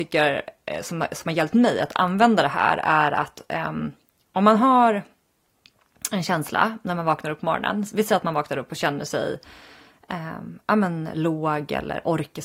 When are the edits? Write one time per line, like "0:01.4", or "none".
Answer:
none